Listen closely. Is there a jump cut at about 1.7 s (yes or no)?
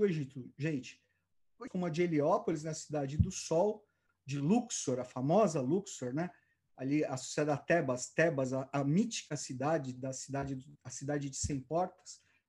yes